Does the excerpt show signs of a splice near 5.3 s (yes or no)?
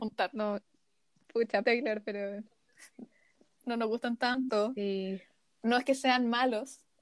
no